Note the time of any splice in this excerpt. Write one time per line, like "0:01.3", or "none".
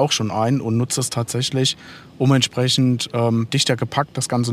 0:03.5